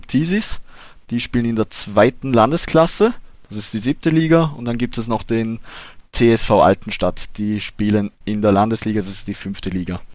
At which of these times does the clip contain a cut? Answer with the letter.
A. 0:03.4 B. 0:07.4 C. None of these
C